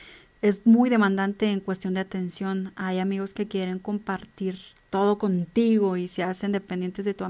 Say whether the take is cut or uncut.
uncut